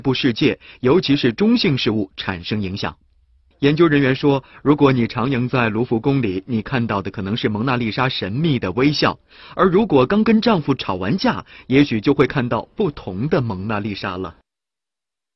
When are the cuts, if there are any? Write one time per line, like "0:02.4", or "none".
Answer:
none

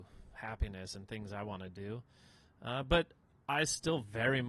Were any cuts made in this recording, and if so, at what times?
none

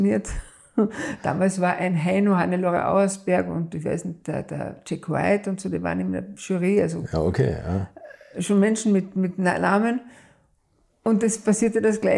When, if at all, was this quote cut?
none

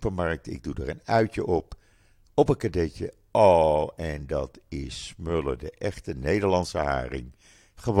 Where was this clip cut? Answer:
none

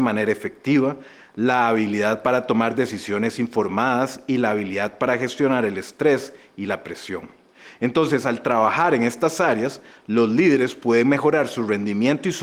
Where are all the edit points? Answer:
none

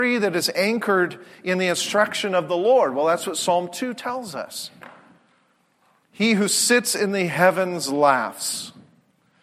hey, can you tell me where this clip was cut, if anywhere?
0:06.0

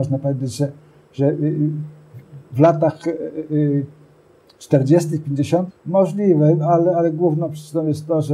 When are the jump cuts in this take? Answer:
0:05.7

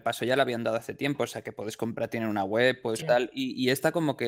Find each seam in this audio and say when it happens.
0:03.0

